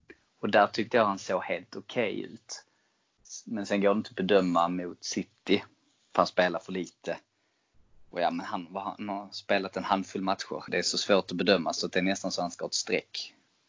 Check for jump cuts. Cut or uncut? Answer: cut